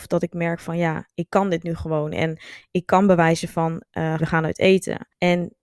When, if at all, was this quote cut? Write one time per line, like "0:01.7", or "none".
0:04.2